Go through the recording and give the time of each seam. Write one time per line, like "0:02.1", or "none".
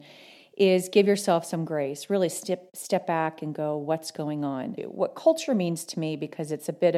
0:04.8